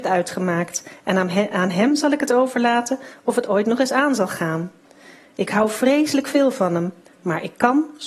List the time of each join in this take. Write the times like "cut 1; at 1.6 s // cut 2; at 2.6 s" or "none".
none